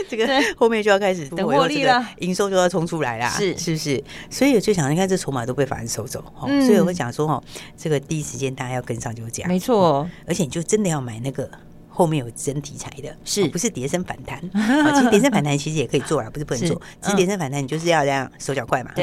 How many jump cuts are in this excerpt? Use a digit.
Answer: 1